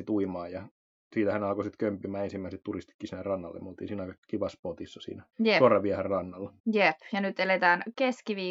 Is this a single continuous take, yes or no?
no